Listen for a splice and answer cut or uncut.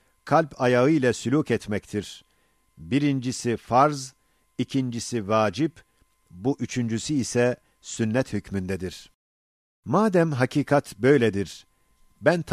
uncut